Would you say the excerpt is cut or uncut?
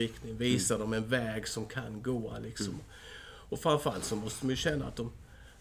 uncut